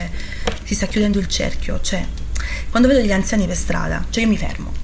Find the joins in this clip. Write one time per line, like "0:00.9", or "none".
none